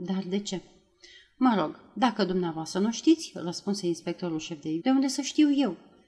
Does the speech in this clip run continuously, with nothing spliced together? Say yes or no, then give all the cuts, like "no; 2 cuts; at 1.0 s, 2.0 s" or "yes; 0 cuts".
no; 1 cut; at 4.8 s